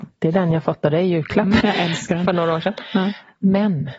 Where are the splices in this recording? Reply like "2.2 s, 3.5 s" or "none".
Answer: 1.6 s